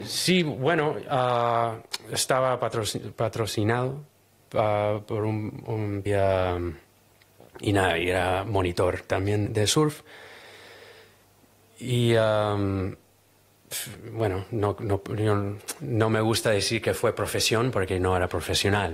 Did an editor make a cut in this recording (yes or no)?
yes